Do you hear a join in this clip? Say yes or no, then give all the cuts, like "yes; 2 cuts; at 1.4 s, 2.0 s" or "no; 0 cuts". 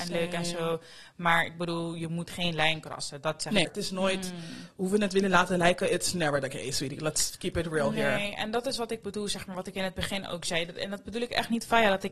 yes; 1 cut; at 3.6 s